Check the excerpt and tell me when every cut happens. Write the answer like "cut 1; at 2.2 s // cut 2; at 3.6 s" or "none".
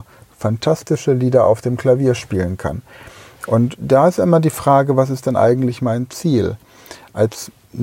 none